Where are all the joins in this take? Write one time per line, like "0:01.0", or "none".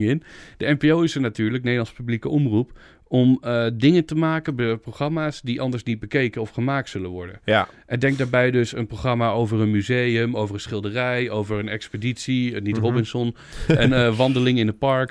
none